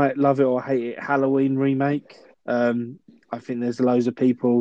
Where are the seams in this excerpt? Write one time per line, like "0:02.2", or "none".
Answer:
0:02.3

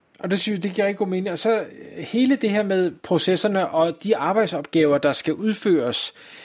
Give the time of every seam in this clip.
none

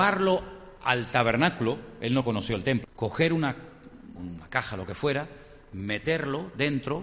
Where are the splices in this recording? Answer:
0:02.8
0:04.2

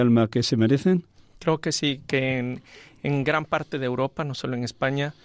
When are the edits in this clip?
0:01.2

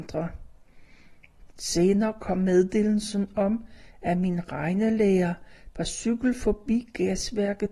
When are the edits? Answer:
0:01.5
0:05.7

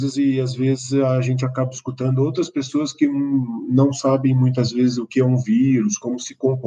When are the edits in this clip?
none

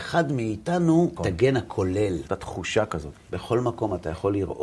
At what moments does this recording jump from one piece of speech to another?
0:01.2
0:02.3

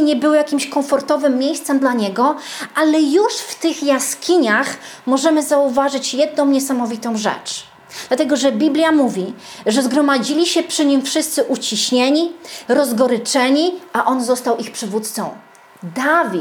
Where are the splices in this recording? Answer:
0:12.7

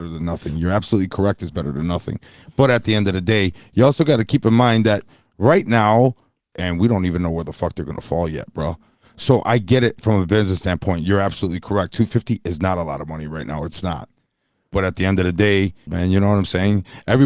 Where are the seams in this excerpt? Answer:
0:06.5
0:15.9

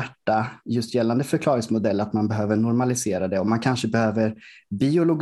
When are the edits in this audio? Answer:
none

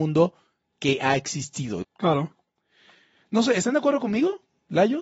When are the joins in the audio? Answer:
0:01.8

